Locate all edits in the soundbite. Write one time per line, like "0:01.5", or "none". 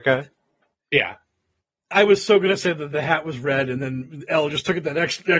none

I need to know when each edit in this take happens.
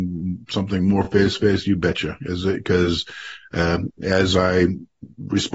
none

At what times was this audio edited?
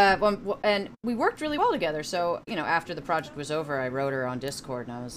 none

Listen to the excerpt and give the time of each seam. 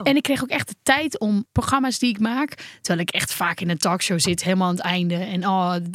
0:01.5

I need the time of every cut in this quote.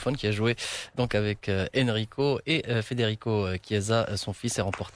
none

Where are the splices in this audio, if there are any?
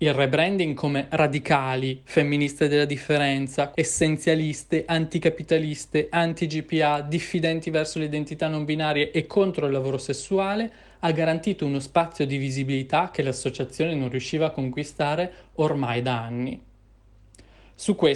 0:03.7

